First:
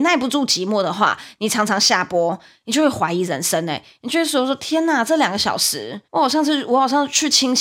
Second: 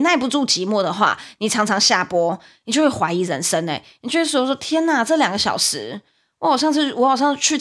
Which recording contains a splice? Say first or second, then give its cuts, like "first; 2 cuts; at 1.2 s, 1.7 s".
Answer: first; 1 cut; at 6.0 s